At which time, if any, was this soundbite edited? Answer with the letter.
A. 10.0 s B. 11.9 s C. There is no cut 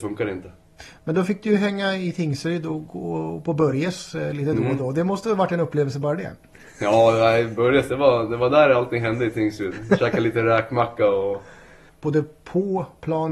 B